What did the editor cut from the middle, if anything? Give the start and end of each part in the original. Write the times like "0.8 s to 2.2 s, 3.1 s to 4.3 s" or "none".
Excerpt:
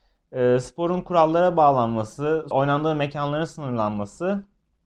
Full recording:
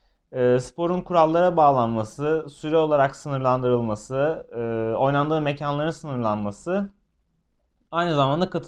2.5 s to 5.0 s